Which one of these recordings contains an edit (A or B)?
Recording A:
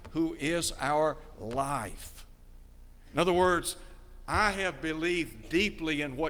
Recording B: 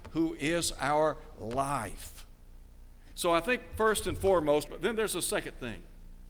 B